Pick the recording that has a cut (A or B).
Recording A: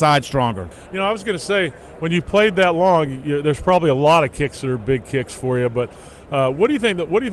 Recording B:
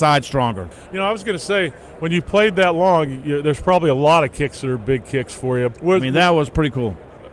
B